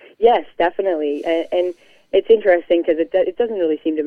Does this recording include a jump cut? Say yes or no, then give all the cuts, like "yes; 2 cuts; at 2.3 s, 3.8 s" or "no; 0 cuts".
no; 0 cuts